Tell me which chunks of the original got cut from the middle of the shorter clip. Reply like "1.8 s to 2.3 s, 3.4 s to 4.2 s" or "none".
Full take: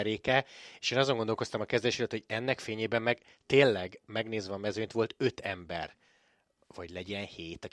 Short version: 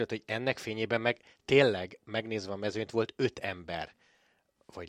none